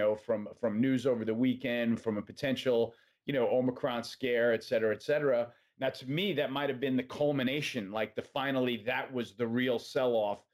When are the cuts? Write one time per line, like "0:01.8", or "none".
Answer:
0:05.7